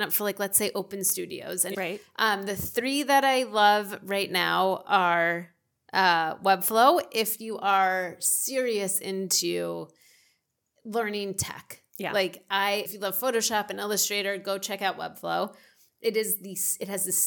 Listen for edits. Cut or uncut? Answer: cut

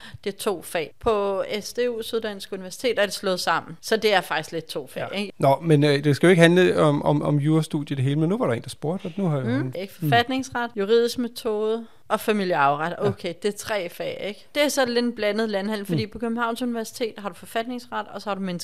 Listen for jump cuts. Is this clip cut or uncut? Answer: cut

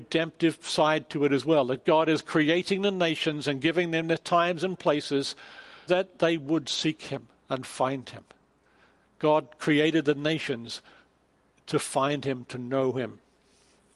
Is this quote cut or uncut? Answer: cut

